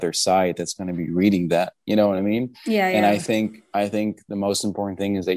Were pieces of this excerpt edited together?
no; 0 cuts

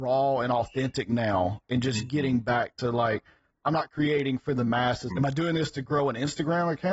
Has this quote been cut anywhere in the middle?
yes; 1 cut; at 5.1 s

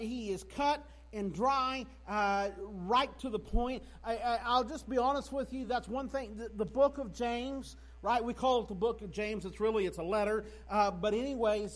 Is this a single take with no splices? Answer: yes; 0 cuts

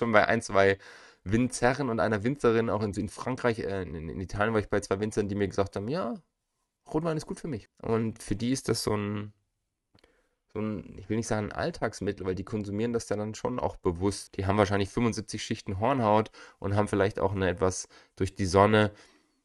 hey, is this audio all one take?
no; 2 cuts; at 7.7 s, 14.3 s

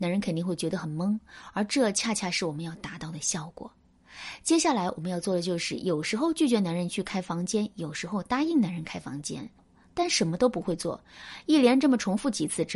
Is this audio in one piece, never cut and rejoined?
yes; 0 cuts

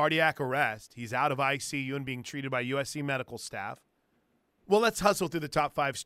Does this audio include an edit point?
yes; 1 cut; at 4.6 s

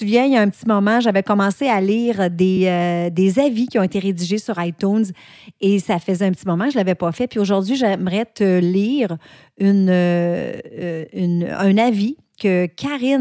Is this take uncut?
yes; 0 cuts

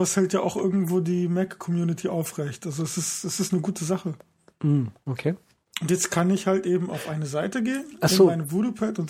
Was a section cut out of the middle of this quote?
yes; 1 cut; at 5.7 s

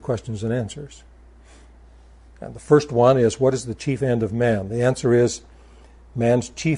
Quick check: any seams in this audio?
no; 0 cuts

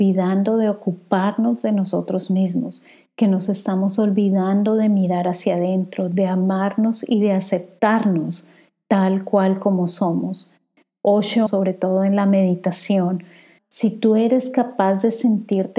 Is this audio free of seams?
no; 2 cuts; at 11.5 s, 13.6 s

